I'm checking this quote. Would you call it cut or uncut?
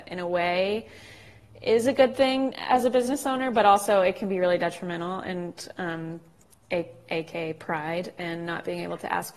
cut